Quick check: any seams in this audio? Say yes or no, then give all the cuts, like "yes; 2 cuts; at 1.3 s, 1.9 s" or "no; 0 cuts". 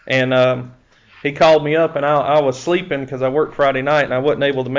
no; 0 cuts